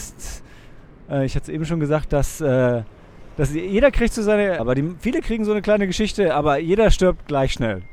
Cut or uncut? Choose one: cut